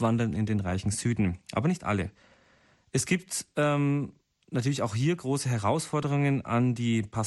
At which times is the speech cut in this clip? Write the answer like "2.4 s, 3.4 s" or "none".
none